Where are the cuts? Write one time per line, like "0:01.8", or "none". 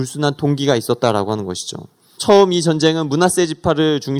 0:02.2